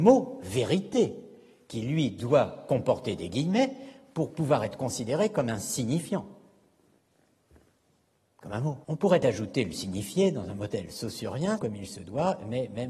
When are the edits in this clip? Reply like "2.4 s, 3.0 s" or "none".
8.8 s, 11.6 s